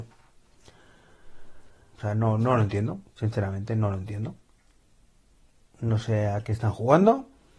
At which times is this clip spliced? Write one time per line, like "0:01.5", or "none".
0:01.9